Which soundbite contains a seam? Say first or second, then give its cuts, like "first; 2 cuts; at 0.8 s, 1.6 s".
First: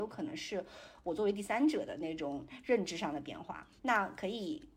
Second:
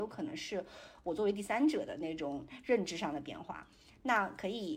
first; 1 cut; at 3.8 s